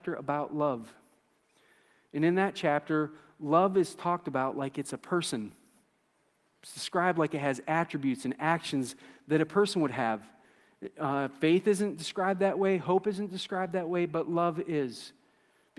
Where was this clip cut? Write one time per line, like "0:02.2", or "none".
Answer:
none